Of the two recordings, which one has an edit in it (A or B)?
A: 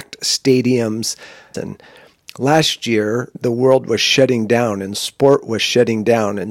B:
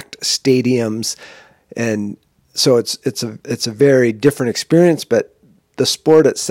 A